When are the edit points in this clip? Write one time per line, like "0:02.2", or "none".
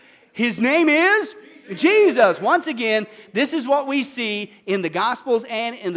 none